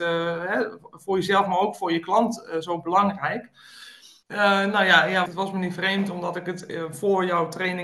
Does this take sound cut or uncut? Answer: cut